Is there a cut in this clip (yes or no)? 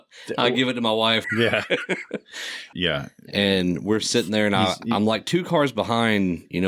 yes